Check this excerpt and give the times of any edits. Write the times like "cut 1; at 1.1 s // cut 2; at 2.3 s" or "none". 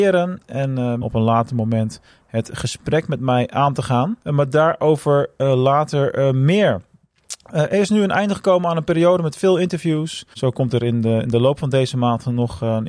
cut 1; at 1.0 s // cut 2; at 4.2 s // cut 3; at 10.3 s